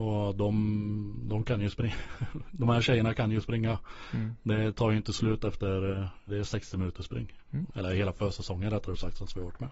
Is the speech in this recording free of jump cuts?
no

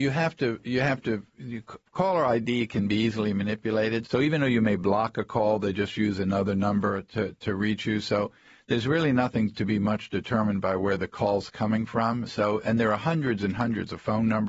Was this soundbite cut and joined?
yes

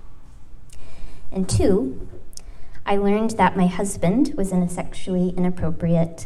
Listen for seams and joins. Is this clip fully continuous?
yes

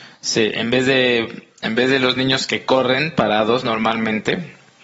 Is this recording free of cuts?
yes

